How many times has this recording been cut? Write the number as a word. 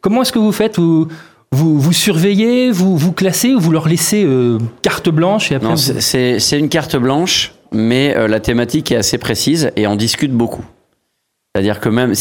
zero